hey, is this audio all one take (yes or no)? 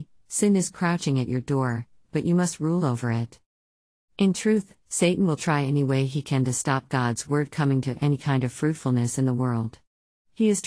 no